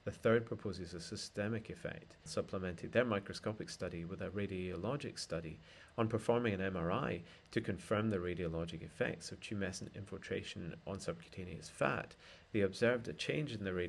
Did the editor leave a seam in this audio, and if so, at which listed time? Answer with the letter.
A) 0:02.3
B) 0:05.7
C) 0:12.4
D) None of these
A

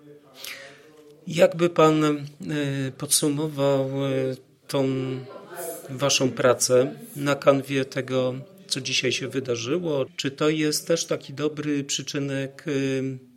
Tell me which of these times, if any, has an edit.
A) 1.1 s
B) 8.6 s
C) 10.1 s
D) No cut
C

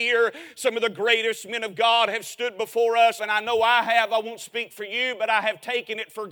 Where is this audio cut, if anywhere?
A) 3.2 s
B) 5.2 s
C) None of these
A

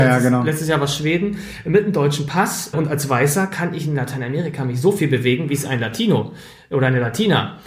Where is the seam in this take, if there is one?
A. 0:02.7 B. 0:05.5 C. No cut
A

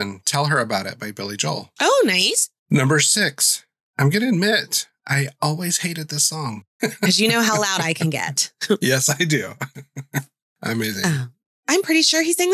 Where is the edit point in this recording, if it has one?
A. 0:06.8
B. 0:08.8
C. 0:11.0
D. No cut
A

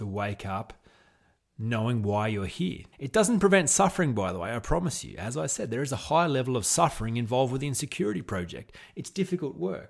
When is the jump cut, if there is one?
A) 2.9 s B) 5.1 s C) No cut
A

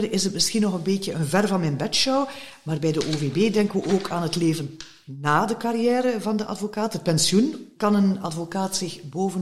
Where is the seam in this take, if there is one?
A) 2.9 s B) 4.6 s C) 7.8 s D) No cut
C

